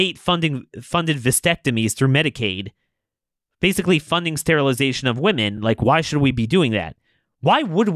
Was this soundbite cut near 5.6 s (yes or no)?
no